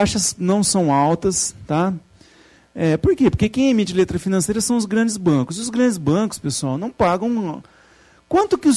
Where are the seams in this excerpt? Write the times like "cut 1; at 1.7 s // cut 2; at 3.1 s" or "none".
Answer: none